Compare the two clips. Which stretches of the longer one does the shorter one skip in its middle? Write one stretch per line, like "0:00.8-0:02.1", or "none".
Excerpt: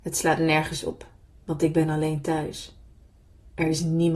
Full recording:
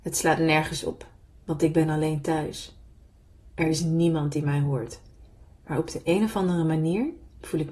none